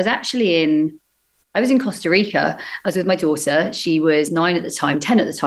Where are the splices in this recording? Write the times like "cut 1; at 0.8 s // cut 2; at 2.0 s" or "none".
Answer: none